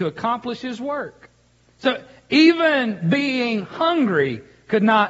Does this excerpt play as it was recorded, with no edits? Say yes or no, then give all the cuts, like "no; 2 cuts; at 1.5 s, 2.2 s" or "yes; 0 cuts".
yes; 0 cuts